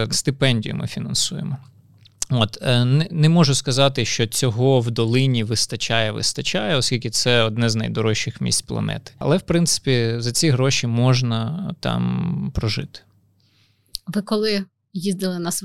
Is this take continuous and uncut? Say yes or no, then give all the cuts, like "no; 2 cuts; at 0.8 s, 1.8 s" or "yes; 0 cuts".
yes; 0 cuts